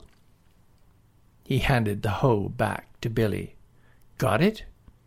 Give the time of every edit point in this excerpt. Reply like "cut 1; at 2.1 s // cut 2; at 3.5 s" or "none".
cut 1; at 1.3 s